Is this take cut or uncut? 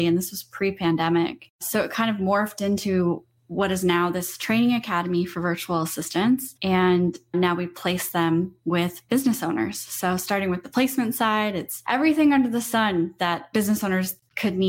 uncut